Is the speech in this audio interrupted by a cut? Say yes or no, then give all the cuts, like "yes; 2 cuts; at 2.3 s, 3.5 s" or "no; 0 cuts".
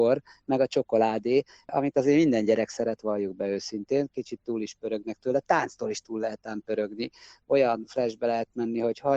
no; 0 cuts